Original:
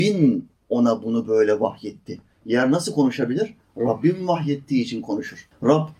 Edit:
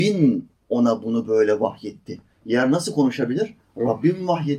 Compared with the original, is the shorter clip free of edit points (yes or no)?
yes